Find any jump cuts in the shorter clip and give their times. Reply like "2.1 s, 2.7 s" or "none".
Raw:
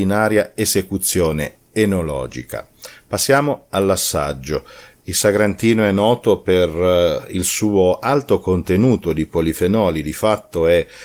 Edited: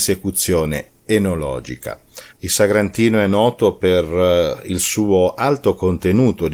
2.3 s